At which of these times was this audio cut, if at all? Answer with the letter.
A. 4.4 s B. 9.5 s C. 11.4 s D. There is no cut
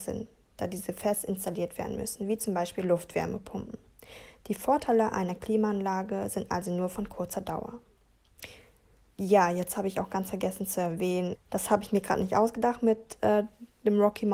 C